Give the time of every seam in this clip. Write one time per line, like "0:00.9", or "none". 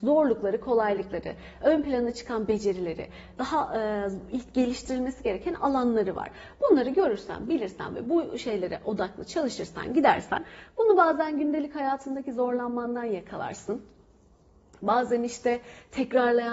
none